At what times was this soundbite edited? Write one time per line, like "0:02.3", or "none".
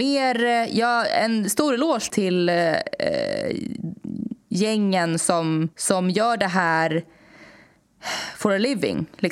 0:02.1
0:05.7